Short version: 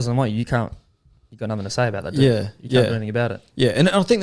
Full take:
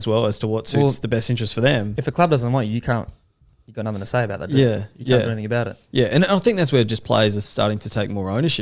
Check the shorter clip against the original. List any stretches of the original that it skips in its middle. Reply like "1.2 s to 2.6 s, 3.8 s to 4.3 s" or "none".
none

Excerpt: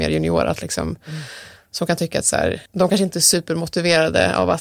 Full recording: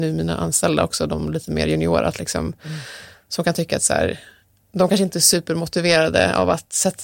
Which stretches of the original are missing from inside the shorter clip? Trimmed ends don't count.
4.2 s to 4.7 s

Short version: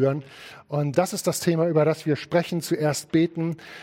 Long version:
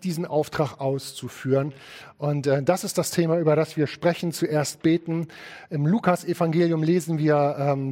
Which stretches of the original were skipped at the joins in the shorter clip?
2.4 s to 2.6 s

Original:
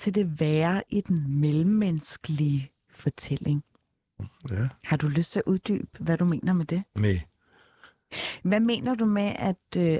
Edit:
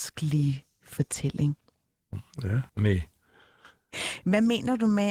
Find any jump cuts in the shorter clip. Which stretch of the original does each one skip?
4.8 s to 6.9 s

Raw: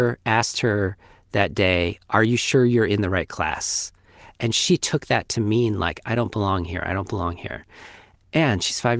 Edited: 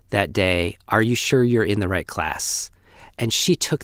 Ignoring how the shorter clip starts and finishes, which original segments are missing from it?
none

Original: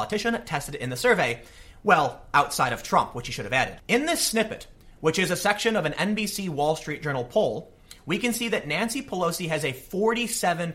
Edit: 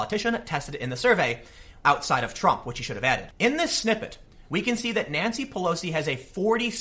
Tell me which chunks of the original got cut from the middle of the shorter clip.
1.8 s to 2.3 s, 4.9 s to 8.0 s

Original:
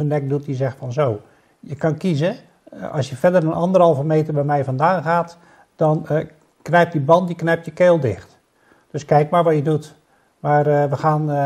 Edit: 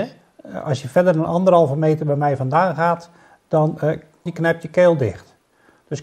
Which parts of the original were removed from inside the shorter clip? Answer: 6.5 s to 7.3 s

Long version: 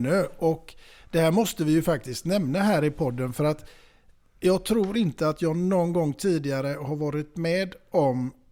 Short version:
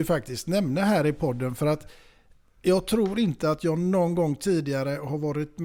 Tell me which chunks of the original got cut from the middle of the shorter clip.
none

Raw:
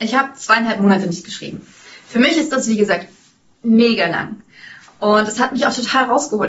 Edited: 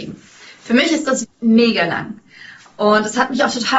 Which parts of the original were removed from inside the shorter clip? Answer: 2.7 s to 3.4 s

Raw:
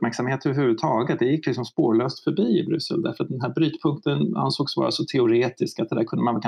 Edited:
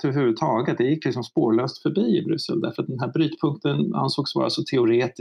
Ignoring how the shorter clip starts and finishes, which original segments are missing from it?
none

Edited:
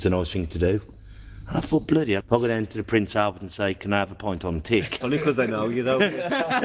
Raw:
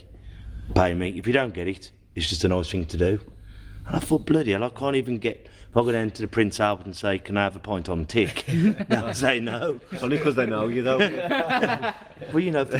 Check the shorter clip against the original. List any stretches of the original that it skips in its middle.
4.6 s to 5.6 s, 8.4 s to 10.0 s

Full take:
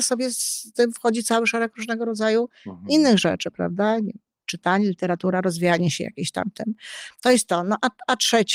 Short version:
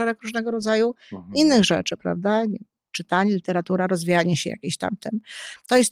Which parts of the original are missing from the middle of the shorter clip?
none

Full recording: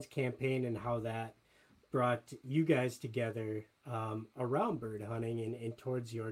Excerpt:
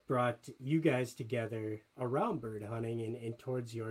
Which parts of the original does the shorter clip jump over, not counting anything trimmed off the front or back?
3.8 s to 4.3 s

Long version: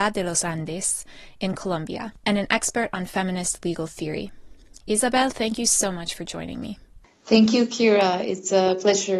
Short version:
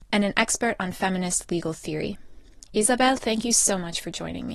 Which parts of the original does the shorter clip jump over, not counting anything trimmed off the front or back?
none

